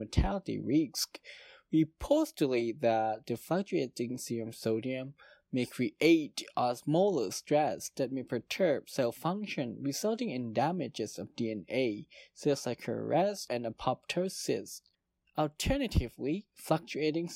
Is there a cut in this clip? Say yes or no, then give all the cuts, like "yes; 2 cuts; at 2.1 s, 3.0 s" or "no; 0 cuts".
no; 0 cuts